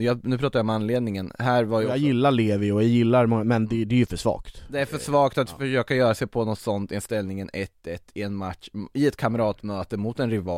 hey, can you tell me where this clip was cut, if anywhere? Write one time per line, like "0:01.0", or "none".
none